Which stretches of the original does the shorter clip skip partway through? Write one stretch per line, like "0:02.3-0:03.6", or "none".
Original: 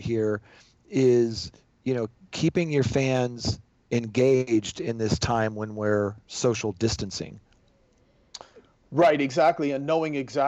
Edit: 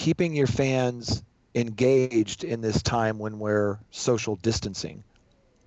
none